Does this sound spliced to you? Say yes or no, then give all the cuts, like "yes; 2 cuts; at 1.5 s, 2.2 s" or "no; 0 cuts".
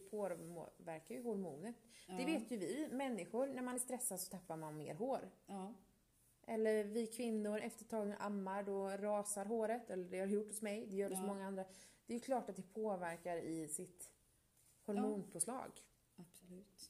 yes; 1 cut; at 7.6 s